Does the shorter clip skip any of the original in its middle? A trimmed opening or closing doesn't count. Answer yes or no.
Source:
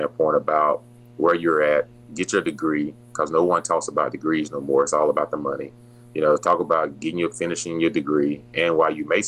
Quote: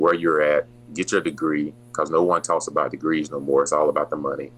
no